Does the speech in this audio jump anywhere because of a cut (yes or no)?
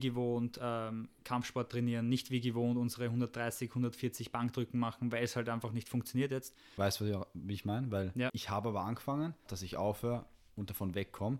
yes